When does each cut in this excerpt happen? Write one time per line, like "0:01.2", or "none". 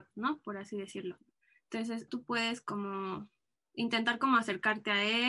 0:02.1